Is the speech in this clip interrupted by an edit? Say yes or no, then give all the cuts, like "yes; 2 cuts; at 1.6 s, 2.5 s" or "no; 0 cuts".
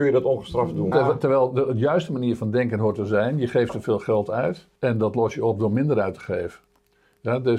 yes; 2 cuts; at 0.9 s, 4.8 s